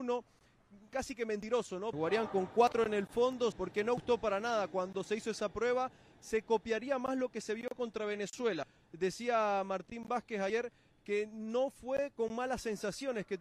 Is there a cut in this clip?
yes; 2 cuts; at 1.9 s, 3.5 s

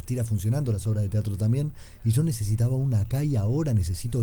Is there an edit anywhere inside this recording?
no; 0 cuts

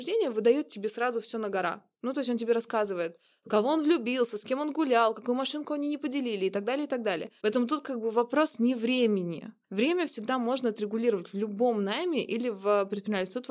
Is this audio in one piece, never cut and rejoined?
no; 1 cut; at 7.4 s

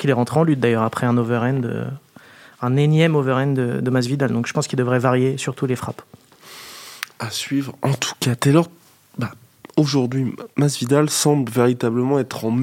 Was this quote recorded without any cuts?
no; 1 cut; at 10.5 s

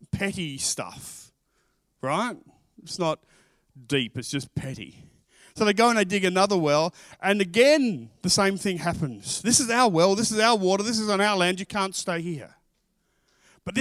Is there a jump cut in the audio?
no; 0 cuts

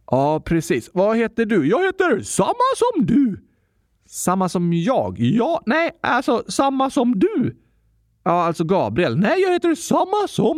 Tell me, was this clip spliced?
no; 0 cuts

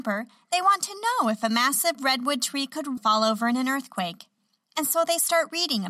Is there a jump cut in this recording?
yes; 1 cut; at 3.0 s

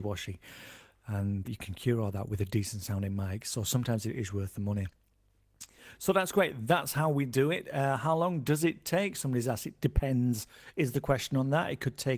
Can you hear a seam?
yes; 1 cut; at 1.4 s

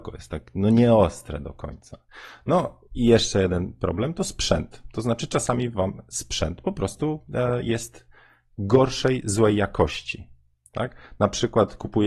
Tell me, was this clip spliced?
no; 0 cuts

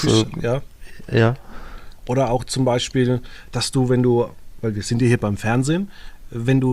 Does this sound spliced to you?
yes; 1 cut; at 2.0 s

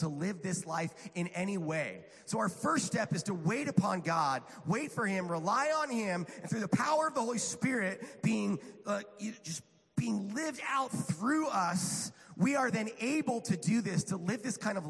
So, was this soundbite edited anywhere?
no; 0 cuts

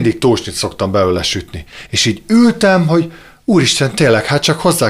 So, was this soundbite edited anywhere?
no; 0 cuts

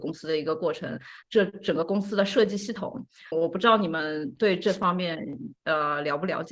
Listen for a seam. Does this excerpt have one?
yes; 2 cuts; at 1.2 s, 3.3 s

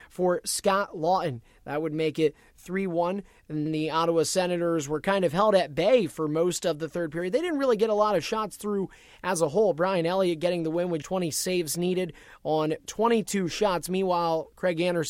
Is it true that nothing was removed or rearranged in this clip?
no; 2 cuts; at 3.7 s, 11.0 s

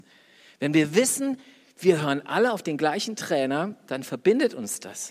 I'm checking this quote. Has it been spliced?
no; 0 cuts

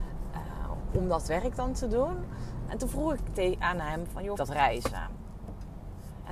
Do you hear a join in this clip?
yes; 2 cuts; at 2.7 s, 4.4 s

